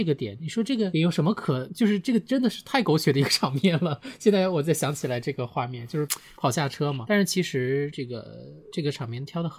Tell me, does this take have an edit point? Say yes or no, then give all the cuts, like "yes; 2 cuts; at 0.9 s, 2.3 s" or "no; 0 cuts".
no; 0 cuts